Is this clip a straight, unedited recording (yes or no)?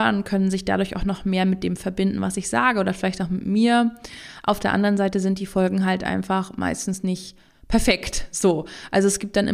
yes